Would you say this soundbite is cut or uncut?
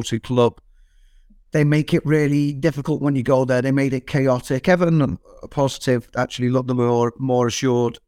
uncut